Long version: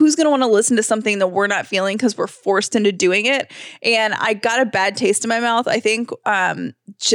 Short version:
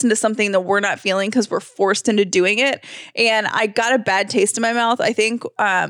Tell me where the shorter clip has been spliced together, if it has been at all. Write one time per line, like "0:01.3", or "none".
none